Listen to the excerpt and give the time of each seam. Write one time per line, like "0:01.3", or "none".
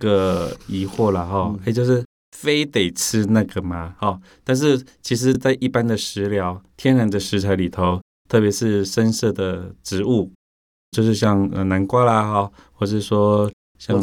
none